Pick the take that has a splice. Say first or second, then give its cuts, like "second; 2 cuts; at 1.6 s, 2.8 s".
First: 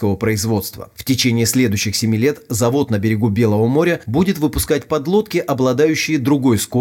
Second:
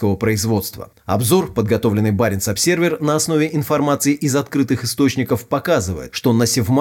second; 1 cut; at 0.9 s